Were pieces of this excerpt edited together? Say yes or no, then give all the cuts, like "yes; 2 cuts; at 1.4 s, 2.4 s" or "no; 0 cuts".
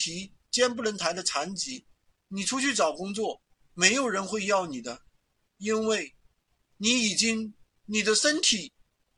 no; 0 cuts